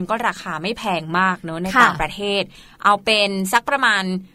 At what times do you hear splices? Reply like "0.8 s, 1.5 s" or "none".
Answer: none